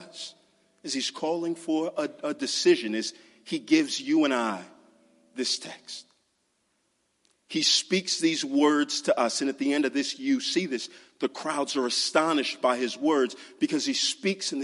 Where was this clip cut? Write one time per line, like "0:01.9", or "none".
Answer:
none